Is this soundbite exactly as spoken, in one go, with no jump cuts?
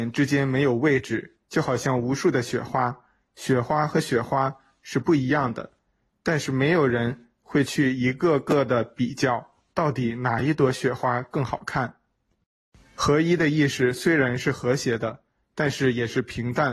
no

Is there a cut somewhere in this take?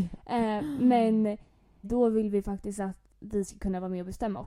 yes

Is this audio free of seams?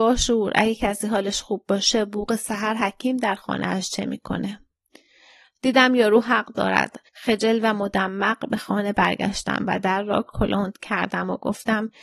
yes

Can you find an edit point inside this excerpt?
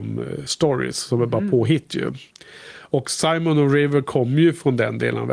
no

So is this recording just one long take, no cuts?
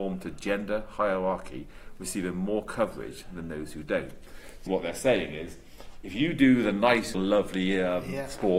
no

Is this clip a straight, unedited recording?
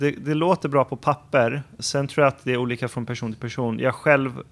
no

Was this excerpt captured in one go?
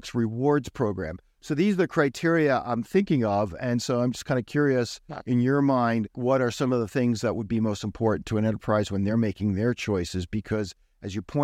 no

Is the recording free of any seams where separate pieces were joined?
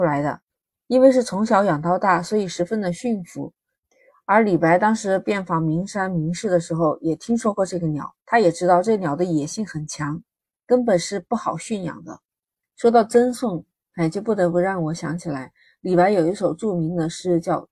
no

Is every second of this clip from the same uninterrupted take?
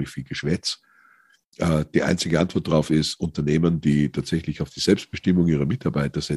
yes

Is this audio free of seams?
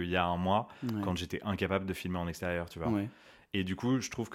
yes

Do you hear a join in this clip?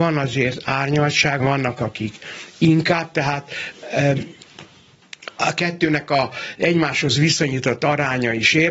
yes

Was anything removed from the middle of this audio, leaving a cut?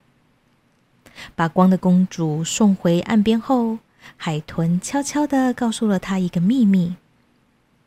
no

